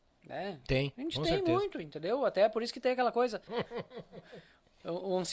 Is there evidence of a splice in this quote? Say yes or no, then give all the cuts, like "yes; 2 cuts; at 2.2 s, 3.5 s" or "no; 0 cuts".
yes; 1 cut; at 3.5 s